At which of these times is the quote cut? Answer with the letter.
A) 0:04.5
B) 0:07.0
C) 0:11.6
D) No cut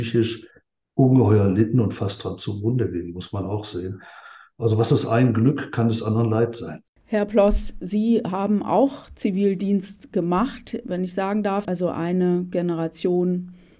C